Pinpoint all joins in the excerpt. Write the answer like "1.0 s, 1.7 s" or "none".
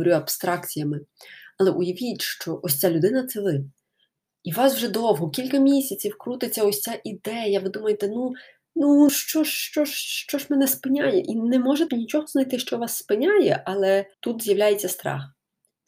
9.1 s, 11.9 s, 14.1 s